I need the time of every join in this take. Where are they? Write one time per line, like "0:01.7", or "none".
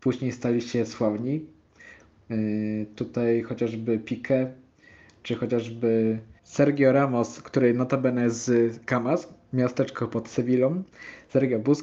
none